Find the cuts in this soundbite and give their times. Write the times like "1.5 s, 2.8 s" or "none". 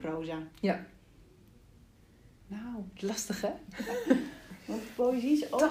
none